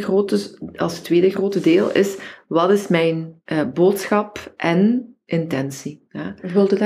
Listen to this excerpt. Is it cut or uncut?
uncut